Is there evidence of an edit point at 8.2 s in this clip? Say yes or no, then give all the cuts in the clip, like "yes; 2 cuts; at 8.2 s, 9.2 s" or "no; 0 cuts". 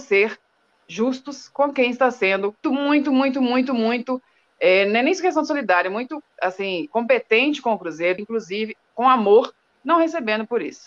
yes; 2 cuts; at 2.6 s, 8.2 s